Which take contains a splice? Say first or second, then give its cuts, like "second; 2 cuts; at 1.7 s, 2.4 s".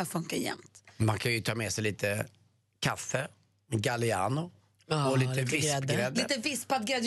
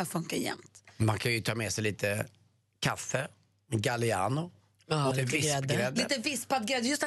second; 1 cut; at 5.1 s